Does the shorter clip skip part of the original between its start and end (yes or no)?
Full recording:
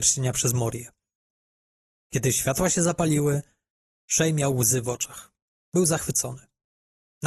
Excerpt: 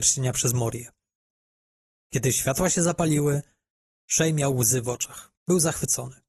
yes